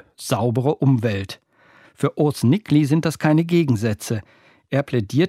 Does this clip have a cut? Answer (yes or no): yes